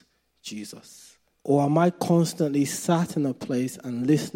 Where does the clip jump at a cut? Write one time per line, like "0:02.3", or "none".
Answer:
0:01.3